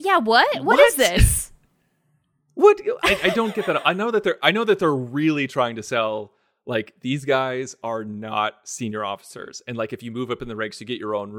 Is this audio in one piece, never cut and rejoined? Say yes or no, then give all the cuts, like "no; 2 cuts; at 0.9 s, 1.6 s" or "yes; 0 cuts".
no; 1 cut; at 3.0 s